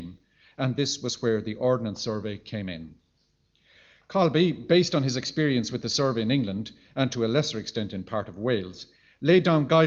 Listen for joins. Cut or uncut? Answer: uncut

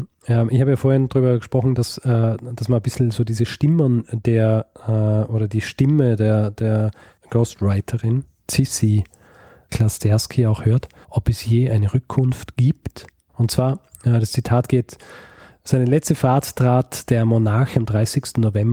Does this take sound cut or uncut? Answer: cut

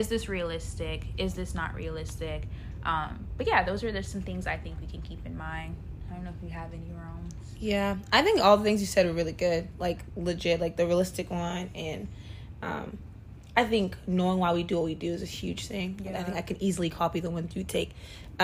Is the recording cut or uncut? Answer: uncut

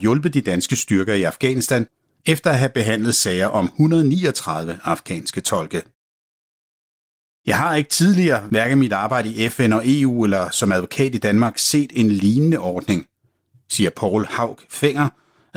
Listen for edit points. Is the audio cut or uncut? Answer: uncut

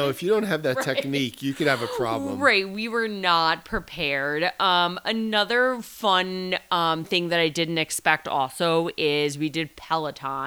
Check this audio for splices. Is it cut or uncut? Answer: uncut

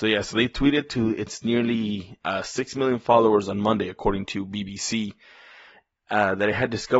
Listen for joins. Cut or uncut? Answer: uncut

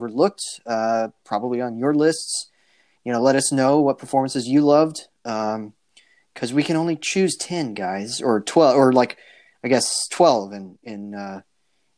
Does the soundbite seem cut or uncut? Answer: uncut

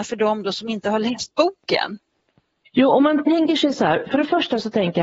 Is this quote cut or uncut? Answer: cut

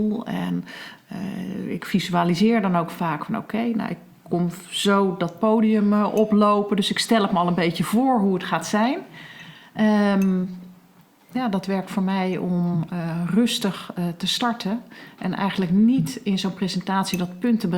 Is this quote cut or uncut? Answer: uncut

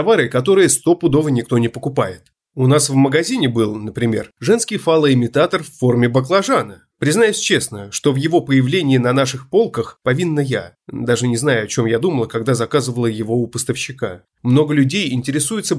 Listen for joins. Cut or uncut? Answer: cut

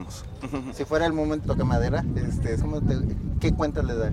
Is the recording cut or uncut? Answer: cut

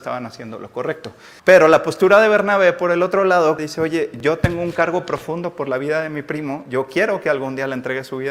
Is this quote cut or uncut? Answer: cut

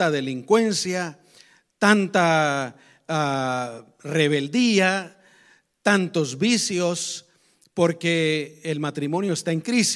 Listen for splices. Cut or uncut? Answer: uncut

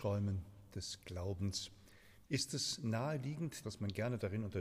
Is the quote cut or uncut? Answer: cut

